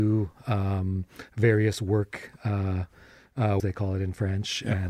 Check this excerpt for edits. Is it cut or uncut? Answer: cut